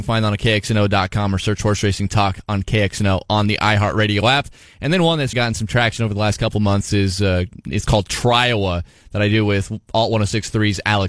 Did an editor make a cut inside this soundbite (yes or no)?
yes